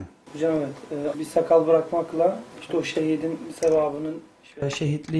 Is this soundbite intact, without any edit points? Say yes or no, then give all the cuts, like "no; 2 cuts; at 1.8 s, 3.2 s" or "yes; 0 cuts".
no; 2 cuts; at 1.1 s, 2.5 s